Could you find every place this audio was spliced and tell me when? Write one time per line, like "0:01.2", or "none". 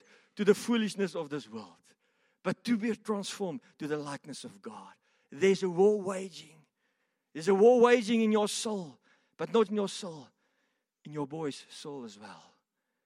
0:09.7

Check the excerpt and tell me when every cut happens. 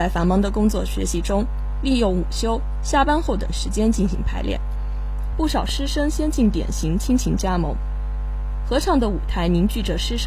0:05.3

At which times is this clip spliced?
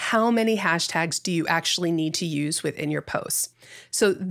none

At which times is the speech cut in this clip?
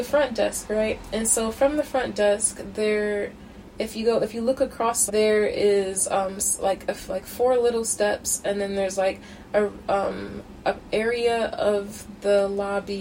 0:05.1

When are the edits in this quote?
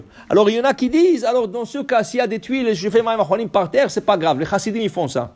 none

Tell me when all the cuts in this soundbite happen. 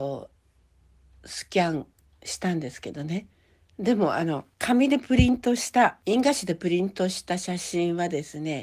0:04.5
0:06.0

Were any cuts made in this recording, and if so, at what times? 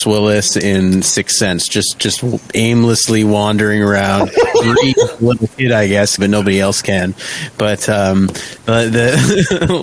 0:06.2

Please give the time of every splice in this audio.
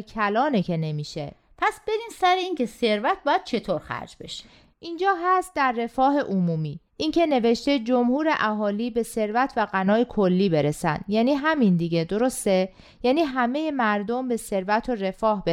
0:06.9

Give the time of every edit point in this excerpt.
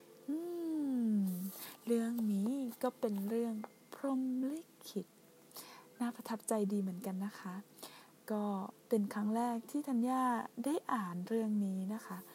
0:08.8

